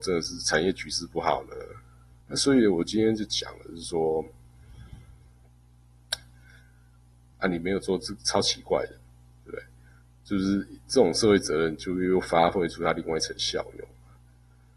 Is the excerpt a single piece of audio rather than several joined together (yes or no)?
no